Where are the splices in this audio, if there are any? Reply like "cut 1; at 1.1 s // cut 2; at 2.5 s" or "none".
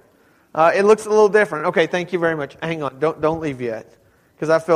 none